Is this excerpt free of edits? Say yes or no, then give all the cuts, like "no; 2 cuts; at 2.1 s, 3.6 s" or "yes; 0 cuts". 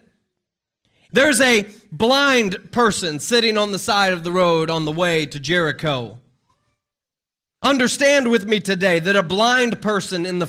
no; 1 cut; at 1.1 s